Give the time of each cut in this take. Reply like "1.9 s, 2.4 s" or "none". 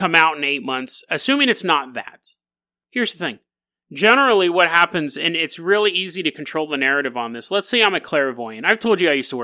none

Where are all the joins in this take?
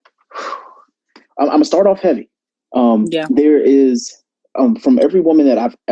2.6 s

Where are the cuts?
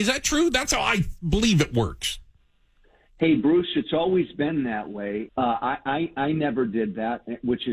5.3 s

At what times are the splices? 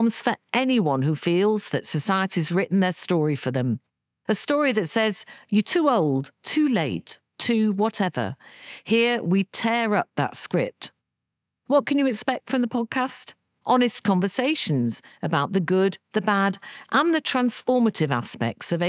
13.6 s

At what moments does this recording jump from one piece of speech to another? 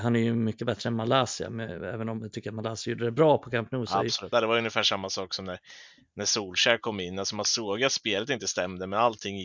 4.3 s

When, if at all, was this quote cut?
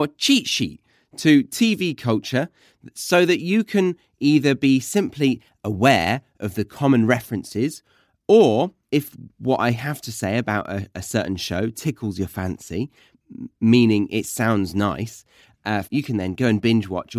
15.8 s

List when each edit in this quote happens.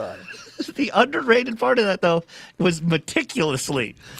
none

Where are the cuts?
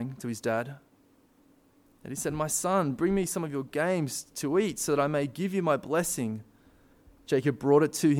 none

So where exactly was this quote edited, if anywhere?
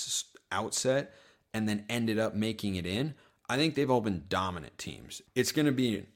5.3 s

